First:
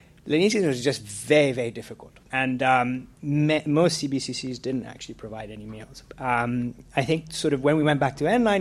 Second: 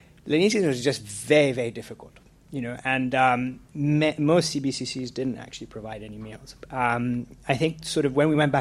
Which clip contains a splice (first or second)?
first